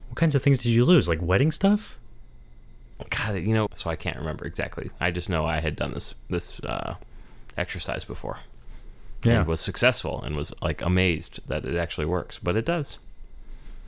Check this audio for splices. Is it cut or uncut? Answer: cut